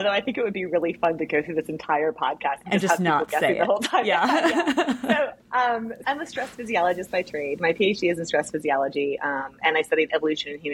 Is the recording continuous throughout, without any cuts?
no; 1 cut; at 6.0 s

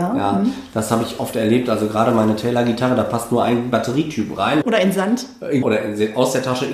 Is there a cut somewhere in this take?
yes; 2 cuts; at 4.6 s, 5.6 s

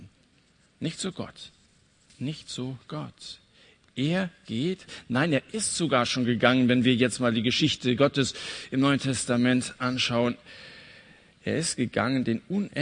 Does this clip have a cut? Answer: no; 0 cuts

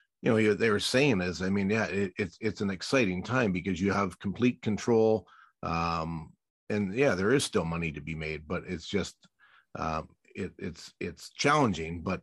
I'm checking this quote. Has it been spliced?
no; 0 cuts

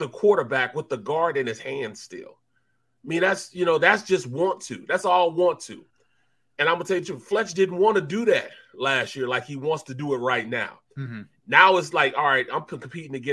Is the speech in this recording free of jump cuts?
no; 1 cut; at 11.4 s

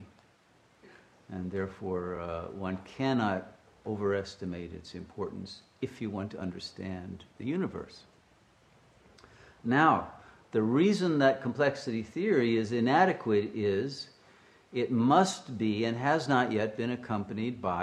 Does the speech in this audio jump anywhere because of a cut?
no; 0 cuts

